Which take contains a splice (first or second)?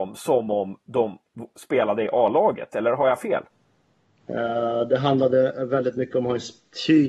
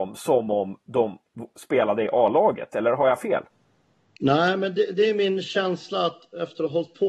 first